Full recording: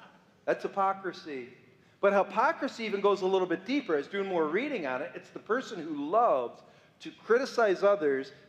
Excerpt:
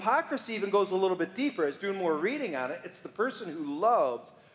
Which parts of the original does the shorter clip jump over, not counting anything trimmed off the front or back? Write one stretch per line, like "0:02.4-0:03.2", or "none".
none